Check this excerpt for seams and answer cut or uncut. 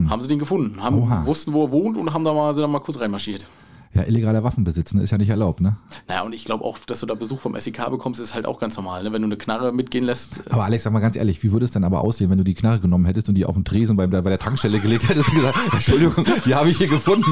uncut